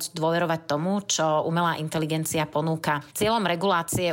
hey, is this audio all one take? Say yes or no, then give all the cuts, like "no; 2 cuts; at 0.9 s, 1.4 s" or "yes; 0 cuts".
no; 1 cut; at 3.1 s